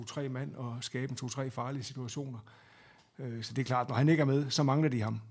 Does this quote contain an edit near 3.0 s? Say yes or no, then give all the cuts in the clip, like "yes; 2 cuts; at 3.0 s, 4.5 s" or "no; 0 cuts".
no; 0 cuts